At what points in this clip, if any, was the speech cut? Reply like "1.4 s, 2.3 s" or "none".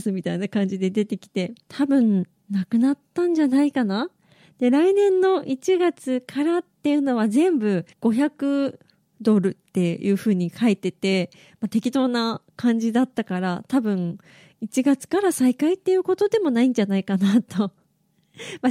7.9 s